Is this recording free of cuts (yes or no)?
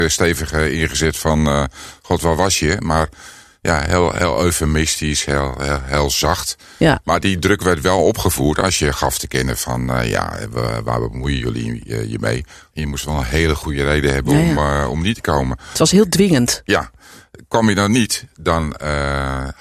no